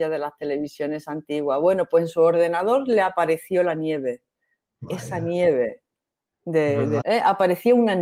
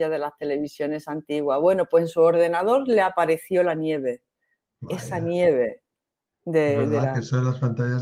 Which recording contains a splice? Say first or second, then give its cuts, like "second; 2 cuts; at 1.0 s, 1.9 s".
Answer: first; 1 cut; at 7.0 s